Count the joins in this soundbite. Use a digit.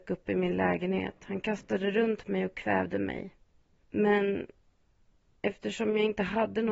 1